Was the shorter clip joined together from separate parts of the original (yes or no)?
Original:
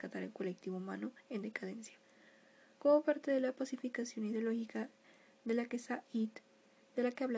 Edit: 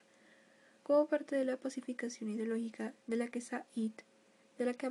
yes